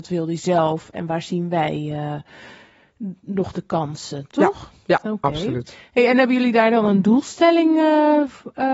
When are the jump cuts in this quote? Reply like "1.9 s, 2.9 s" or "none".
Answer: none